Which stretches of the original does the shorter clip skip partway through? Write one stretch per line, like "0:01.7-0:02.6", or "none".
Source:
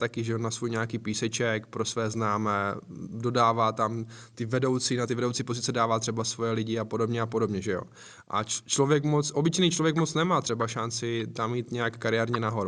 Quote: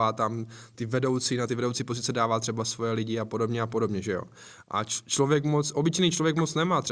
none